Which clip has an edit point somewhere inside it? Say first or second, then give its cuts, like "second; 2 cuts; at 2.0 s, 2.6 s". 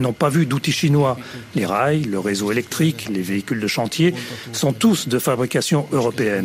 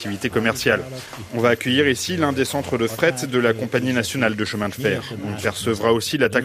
first; 2 cuts; at 2.0 s, 3.1 s